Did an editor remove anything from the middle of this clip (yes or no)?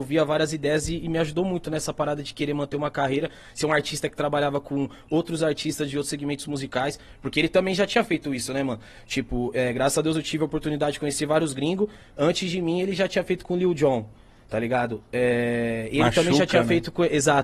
no